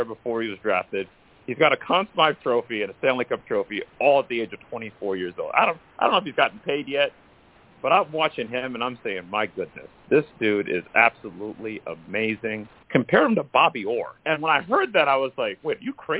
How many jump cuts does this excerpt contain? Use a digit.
3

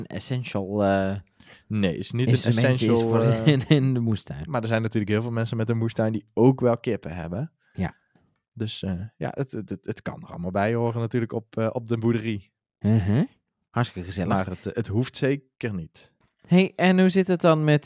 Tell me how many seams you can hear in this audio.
1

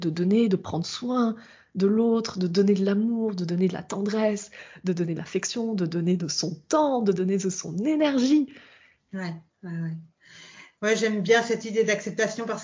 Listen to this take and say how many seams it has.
1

